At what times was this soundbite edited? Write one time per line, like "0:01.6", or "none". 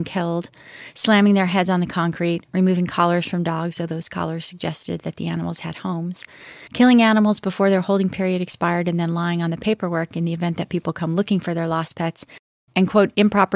none